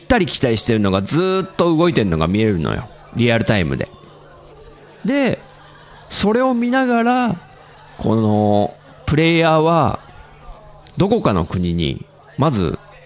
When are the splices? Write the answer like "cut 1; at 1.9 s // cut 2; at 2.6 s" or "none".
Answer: none